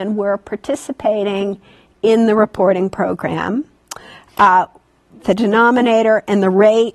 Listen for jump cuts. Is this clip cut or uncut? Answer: cut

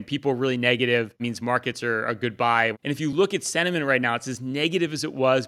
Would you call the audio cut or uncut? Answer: cut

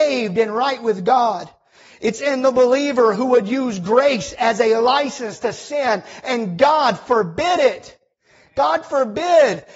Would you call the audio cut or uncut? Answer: uncut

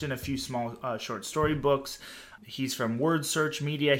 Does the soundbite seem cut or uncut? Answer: cut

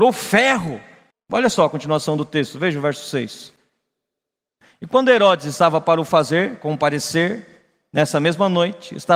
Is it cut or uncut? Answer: cut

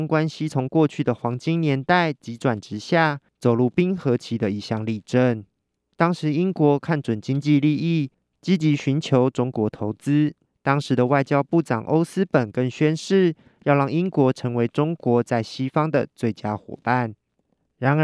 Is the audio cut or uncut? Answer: cut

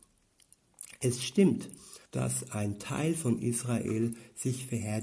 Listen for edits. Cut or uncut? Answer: cut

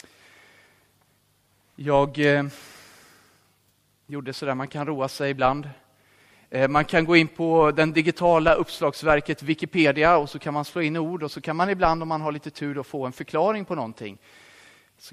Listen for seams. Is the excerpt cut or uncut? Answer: uncut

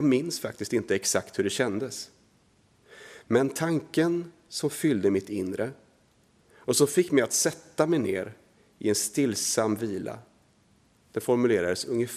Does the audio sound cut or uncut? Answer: uncut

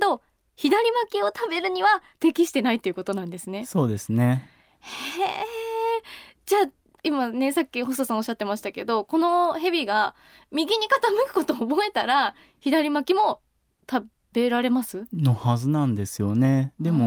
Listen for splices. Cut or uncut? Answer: uncut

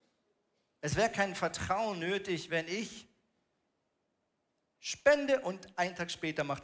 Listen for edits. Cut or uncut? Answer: uncut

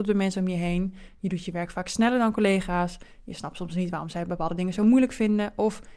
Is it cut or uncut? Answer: uncut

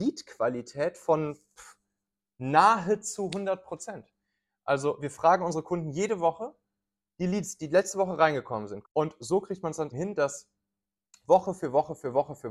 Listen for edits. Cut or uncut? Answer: cut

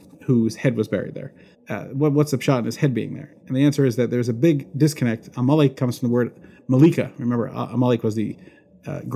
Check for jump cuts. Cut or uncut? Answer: cut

